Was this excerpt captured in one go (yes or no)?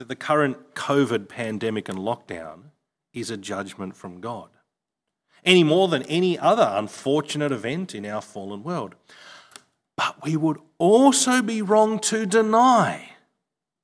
yes